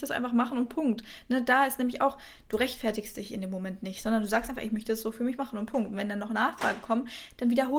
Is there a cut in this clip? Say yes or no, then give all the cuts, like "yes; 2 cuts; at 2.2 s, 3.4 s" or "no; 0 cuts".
no; 0 cuts